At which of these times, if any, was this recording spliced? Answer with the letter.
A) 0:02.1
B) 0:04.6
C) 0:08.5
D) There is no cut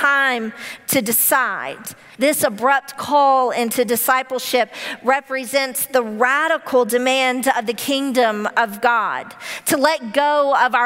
A